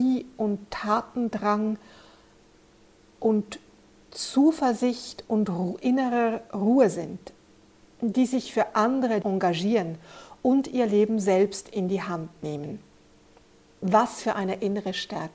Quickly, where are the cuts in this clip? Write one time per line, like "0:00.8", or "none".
0:09.2